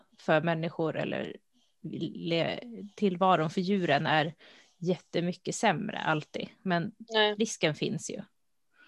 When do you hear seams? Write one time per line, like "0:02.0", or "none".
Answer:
none

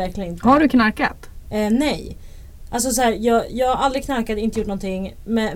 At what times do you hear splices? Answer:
none

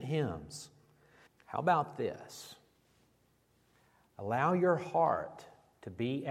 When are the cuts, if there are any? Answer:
0:01.3

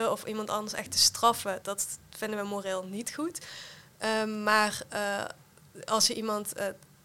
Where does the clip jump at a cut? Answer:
0:01.6

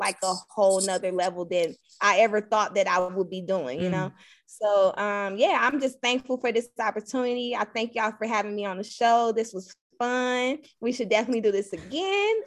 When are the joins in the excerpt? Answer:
none

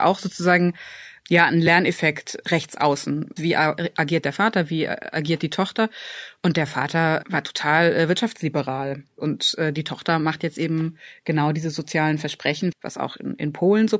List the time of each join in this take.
0:03.4
0:12.7

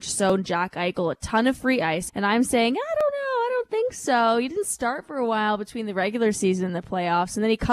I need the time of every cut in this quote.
0:02.1

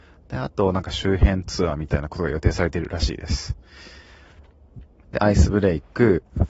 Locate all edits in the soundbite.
0:05.0

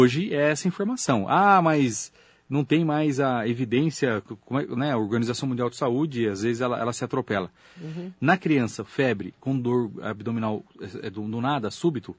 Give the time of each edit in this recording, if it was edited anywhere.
0:07.7

